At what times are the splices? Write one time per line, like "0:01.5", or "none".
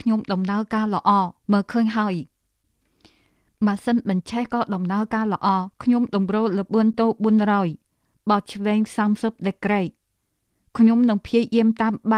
0:01.4
0:05.7